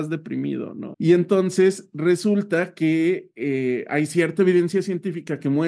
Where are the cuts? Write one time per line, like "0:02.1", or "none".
0:00.9